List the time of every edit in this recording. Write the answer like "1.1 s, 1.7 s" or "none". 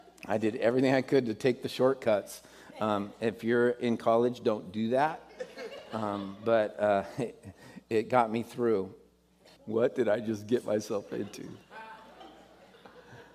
9.6 s